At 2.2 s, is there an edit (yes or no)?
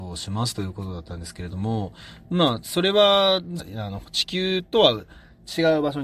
no